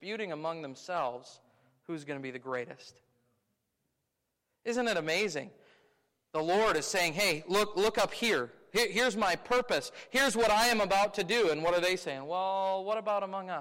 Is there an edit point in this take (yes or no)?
no